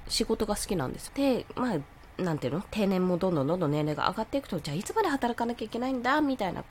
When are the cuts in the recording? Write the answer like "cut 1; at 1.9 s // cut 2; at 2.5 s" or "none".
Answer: cut 1; at 1.1 s